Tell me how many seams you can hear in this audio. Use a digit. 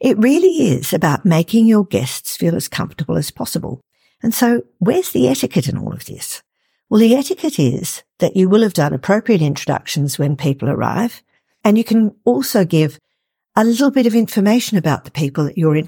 0